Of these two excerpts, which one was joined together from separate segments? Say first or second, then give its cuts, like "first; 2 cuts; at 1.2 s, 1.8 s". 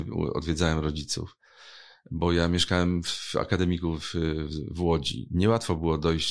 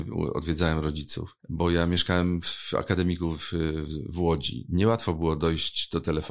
second; 1 cut; at 1.4 s